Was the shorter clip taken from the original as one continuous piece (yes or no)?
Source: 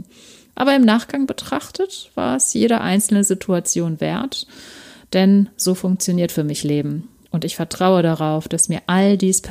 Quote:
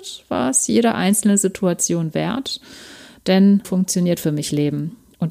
no